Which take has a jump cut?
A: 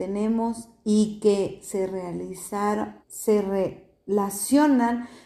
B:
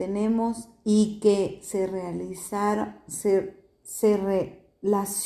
A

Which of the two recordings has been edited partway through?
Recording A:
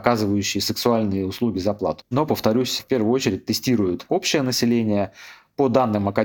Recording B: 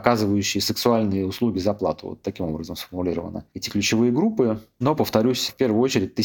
A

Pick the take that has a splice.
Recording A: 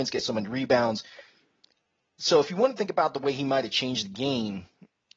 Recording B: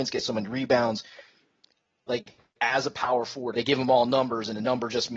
B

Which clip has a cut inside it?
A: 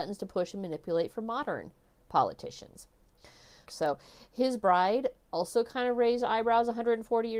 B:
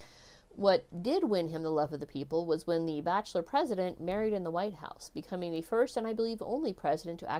A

